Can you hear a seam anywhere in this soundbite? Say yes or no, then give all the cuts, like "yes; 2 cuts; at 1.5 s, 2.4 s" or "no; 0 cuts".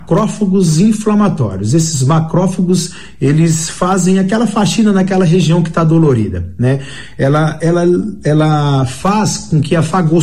no; 0 cuts